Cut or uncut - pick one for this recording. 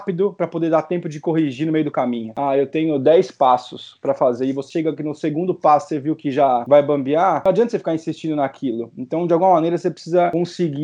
uncut